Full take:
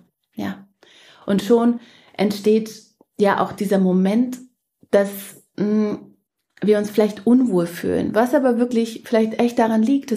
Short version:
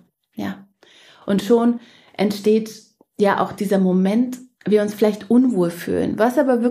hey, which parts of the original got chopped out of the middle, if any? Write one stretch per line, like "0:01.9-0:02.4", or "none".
0:04.6-0:06.5